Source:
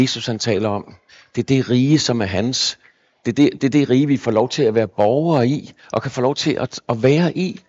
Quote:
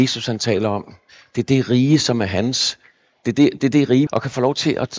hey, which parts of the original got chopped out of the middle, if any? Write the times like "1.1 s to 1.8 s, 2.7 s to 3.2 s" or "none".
4.1 s to 5.9 s